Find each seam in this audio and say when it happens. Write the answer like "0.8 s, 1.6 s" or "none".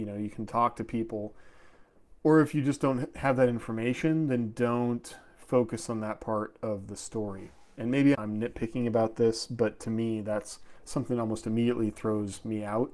8.1 s